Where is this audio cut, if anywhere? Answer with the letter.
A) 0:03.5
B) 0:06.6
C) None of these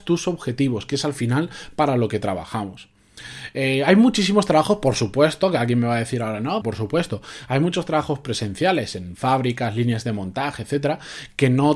B